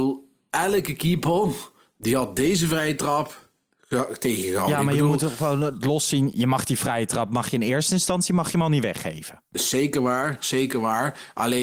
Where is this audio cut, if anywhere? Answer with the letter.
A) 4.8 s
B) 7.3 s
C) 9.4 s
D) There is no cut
D